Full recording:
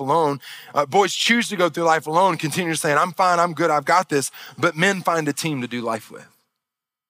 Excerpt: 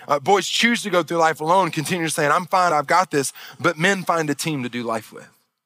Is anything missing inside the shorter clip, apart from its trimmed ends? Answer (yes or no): yes